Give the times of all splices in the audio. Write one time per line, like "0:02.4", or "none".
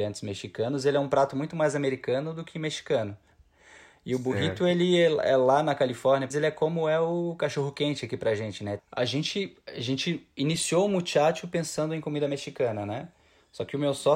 0:06.3
0:08.8